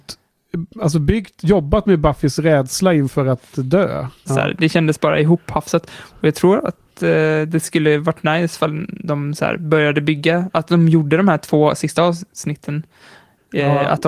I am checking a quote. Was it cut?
yes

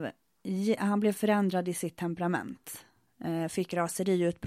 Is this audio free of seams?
yes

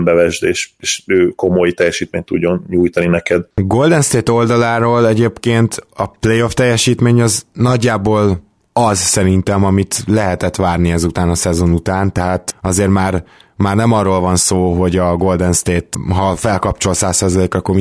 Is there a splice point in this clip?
no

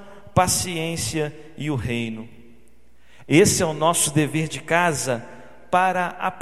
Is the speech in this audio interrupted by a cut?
yes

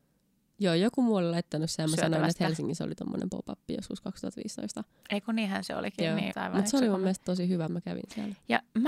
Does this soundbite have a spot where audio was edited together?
yes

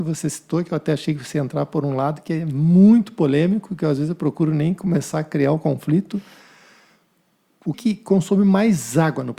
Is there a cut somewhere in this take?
yes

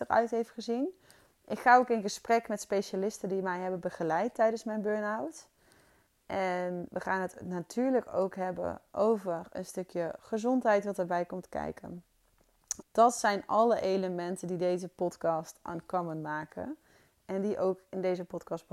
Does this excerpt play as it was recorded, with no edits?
no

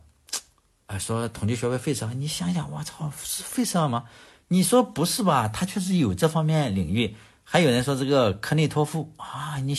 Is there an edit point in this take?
no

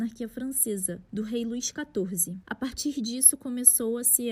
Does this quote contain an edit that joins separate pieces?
yes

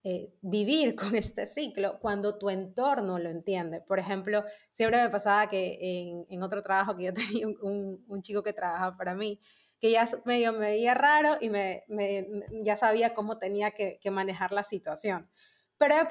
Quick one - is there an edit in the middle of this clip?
no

